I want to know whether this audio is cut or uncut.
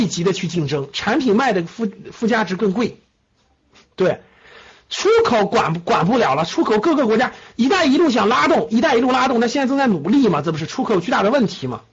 uncut